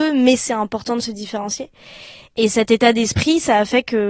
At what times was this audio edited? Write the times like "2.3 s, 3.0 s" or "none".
2.3 s